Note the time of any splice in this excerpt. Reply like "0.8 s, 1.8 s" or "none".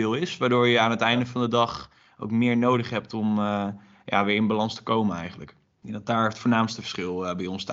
none